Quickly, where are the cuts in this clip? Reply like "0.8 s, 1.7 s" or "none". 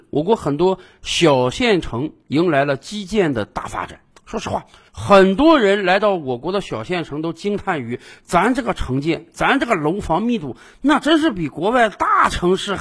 none